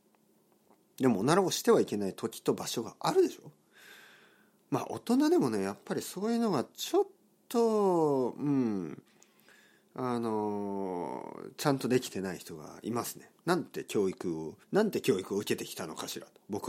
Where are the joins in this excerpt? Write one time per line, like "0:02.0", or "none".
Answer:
0:13.4
0:14.6